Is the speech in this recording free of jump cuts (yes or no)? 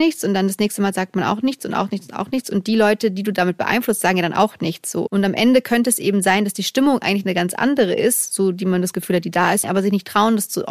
no